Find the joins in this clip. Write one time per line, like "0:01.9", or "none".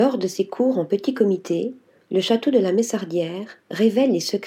none